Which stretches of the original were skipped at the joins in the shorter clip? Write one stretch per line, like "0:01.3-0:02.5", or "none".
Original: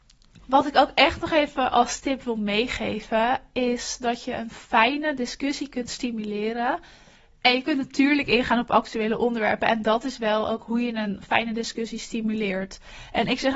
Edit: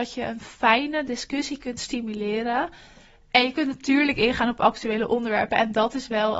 none